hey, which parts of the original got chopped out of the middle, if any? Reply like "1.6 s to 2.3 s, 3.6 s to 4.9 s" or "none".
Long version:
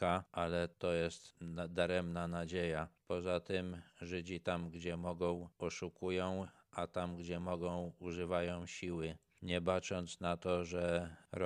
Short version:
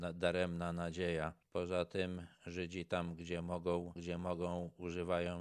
5.5 s to 7.2 s

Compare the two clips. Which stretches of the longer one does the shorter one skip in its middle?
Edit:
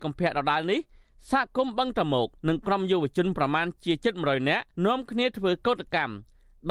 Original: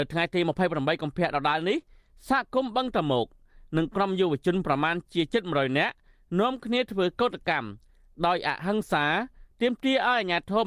3.3 s to 3.7 s, 6.0 s to 6.3 s

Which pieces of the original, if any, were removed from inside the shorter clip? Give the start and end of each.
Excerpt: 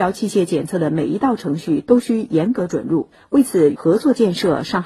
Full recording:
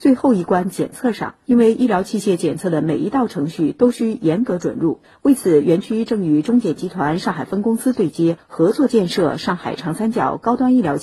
5.6 s to 8.5 s

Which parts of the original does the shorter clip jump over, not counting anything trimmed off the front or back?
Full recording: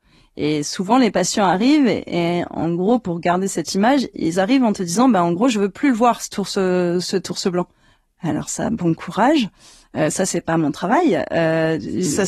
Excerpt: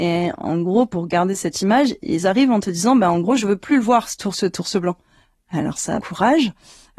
6.5 s to 7.0 s, 8.7 s to 9.0 s

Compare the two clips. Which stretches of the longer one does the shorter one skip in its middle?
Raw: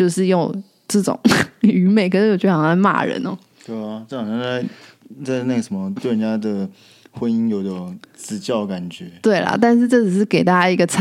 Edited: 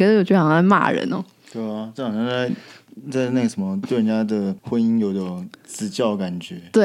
6.7 s to 7.1 s

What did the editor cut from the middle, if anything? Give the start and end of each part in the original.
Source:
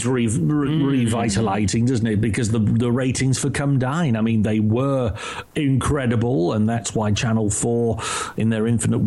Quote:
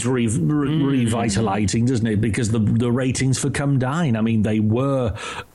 none

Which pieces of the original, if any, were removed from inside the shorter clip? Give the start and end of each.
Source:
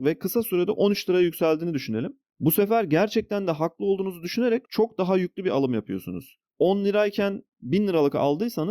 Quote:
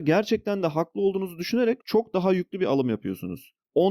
none

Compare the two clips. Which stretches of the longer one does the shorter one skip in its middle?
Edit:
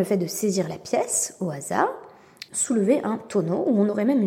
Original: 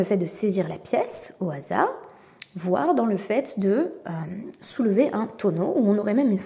2.5 s to 4.6 s

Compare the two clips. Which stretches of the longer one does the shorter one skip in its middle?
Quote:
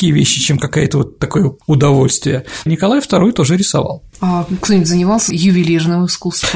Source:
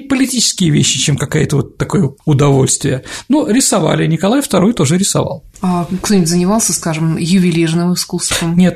3.2 s to 4.1 s, 6.7 s to 7.2 s

